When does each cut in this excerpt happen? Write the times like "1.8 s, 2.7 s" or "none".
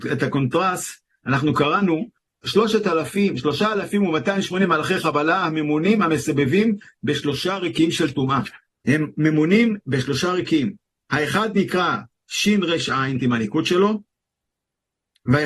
2.4 s, 13.2 s